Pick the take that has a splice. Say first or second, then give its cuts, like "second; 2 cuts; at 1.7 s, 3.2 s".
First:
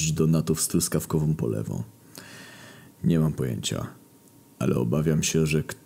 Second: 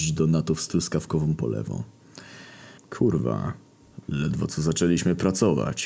second; 1 cut; at 2.8 s